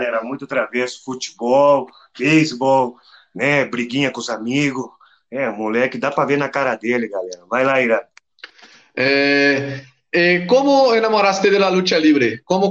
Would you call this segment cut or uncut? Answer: uncut